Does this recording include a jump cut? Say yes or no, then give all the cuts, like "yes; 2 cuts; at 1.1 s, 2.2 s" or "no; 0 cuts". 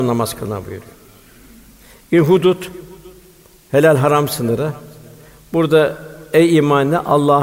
no; 0 cuts